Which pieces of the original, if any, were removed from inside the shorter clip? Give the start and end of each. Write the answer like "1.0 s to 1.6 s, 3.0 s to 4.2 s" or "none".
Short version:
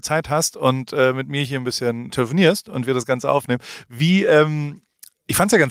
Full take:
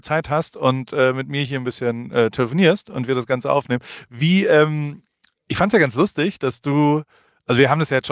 2.1 s to 2.3 s